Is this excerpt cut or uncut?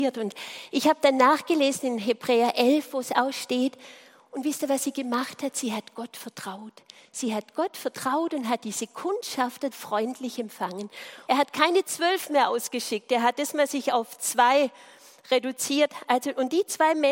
cut